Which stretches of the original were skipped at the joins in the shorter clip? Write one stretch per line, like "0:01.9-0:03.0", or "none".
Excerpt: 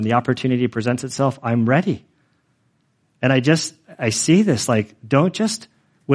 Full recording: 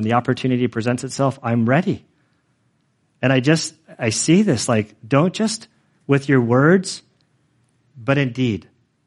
none